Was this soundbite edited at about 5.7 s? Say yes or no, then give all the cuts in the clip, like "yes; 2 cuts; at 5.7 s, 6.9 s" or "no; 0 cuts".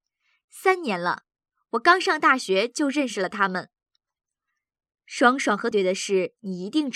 yes; 1 cut; at 5.7 s